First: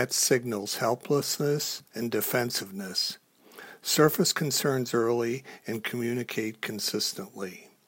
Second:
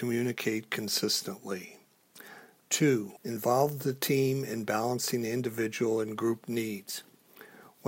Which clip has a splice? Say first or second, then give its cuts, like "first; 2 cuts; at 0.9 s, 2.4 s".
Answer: second; 1 cut; at 3.2 s